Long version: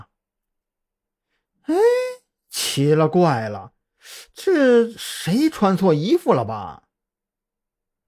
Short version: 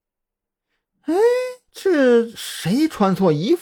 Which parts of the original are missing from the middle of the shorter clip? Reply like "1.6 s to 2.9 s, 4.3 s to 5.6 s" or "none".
2.3 s to 4.3 s